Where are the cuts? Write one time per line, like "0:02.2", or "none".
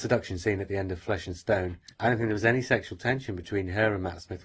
0:01.9